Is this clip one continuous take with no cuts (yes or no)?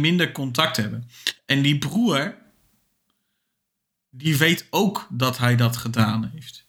yes